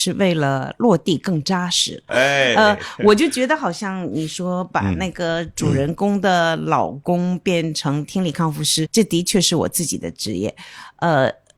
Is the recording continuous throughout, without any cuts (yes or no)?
no